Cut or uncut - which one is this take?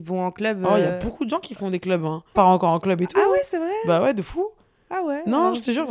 cut